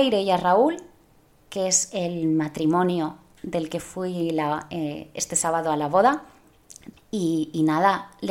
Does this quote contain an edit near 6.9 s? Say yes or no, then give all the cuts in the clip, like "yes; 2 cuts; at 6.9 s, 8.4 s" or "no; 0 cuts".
yes; 1 cut; at 6.9 s